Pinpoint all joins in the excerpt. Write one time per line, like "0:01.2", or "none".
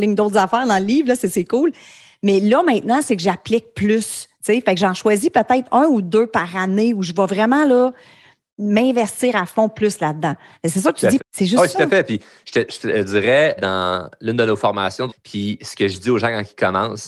0:11.2
0:13.6
0:15.1